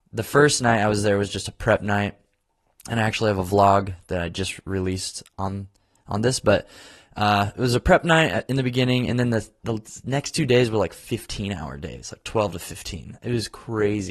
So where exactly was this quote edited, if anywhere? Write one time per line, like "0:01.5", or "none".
none